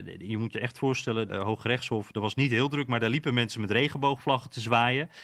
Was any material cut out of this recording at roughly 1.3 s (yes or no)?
yes